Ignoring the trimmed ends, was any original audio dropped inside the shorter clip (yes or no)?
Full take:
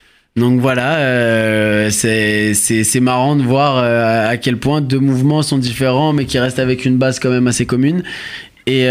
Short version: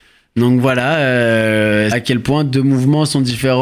yes